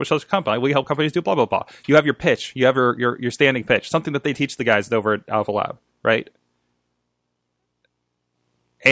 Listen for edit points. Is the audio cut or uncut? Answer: uncut